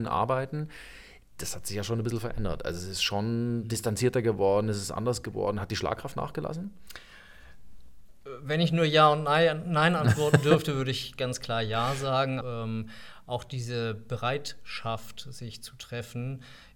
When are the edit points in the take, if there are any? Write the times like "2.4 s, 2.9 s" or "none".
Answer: 12.4 s

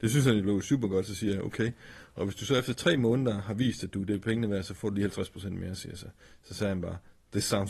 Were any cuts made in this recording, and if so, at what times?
none

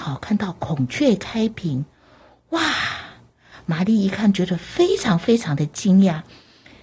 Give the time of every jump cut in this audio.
none

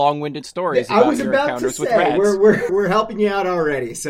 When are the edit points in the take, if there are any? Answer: 2.7 s

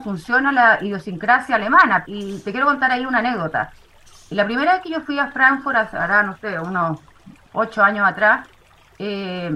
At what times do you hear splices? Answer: 2.0 s

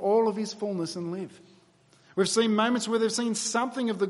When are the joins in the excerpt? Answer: none

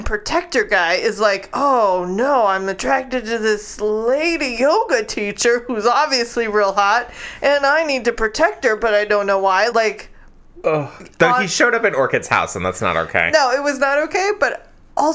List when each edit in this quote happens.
9.7 s

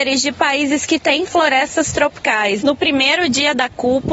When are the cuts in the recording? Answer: 2.6 s

